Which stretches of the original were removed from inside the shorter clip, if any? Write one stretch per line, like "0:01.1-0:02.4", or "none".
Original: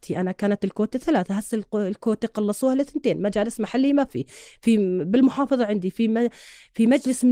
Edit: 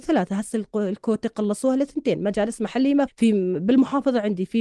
0:04.1-0:04.5